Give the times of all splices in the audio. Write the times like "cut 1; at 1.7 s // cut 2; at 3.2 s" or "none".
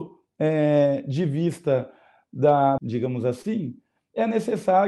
cut 1; at 2.8 s